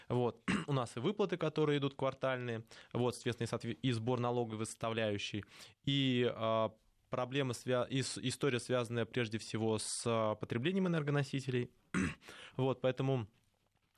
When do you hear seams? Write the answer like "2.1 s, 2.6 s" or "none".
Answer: none